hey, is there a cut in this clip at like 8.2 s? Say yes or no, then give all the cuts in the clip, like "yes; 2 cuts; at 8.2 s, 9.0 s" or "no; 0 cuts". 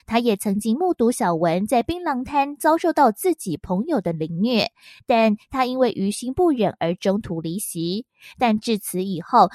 no; 0 cuts